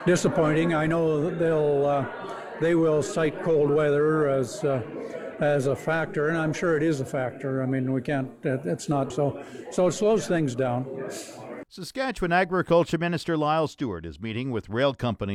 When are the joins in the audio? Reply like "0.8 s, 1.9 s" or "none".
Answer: 9.1 s, 11.6 s